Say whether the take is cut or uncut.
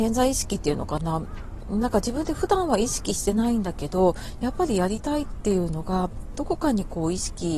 uncut